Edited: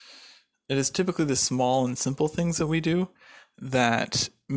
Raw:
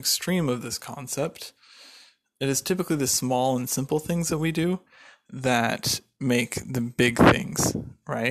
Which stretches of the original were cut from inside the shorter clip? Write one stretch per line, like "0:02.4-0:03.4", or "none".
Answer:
none